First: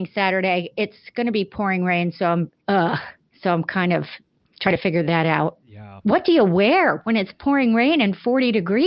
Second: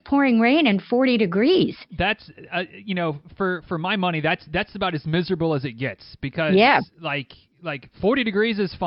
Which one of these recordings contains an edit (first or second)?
first